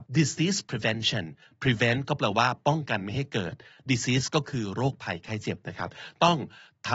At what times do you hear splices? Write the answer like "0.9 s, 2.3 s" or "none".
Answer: none